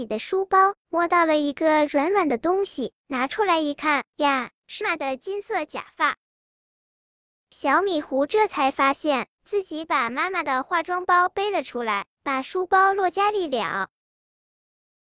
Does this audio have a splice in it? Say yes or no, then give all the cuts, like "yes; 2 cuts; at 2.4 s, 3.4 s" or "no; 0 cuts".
yes; 1 cut; at 4.8 s